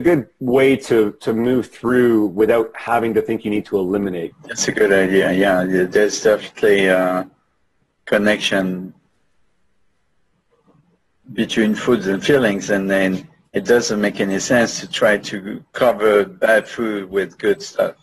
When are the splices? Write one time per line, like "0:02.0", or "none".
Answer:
0:04.3

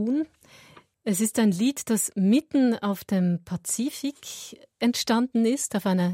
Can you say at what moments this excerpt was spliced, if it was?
none

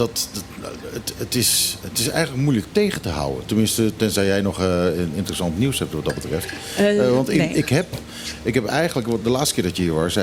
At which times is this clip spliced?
0:01.8

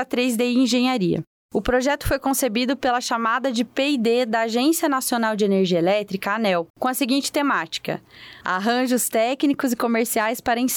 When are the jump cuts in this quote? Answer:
0:01.4
0:06.7
0:08.4

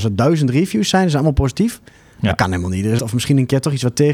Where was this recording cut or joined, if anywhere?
0:03.0

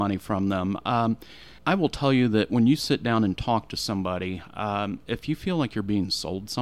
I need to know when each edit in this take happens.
0:01.6

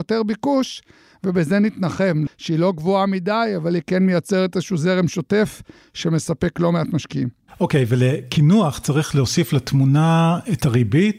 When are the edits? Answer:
0:02.3

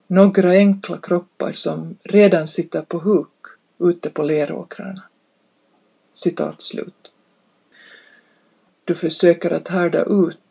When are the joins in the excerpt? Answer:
0:08.7

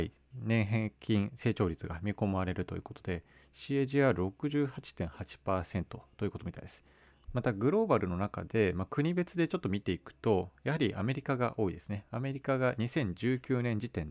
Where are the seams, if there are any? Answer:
0:07.2

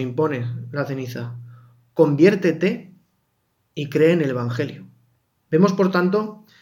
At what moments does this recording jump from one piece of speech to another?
0:05.3

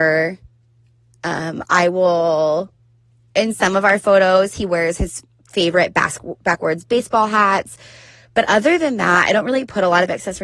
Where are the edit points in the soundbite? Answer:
none

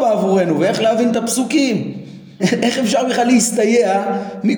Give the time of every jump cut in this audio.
0:02.4

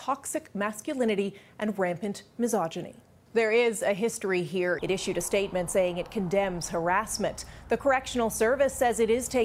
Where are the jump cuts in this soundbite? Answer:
0:03.3
0:04.8

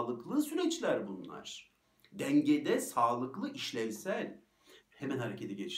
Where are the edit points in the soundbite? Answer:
0:04.8

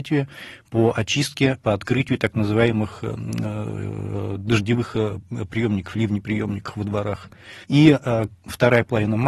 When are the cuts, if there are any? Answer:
0:07.6

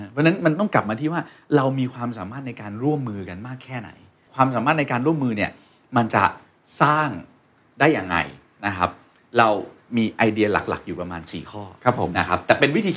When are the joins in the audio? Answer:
0:04.3

